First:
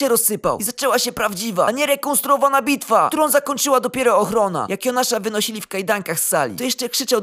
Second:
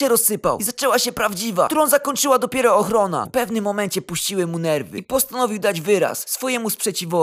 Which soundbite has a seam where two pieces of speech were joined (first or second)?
second